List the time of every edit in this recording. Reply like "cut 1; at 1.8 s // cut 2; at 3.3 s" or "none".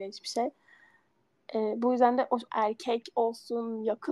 cut 1; at 2.5 s